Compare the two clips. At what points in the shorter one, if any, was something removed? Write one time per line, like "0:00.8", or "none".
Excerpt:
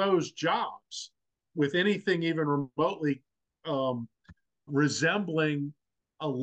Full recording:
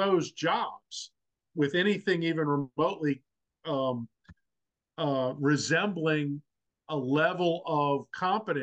0:04.7